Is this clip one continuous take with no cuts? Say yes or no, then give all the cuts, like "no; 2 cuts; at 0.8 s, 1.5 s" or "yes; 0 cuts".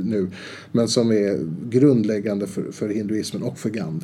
yes; 0 cuts